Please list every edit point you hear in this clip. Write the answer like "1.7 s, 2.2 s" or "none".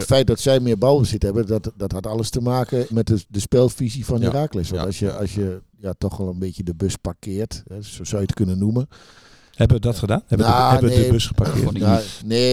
2.9 s